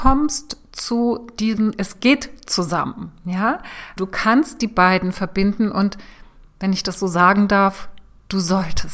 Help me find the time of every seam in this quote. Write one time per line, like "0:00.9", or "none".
0:01.7
0:04.0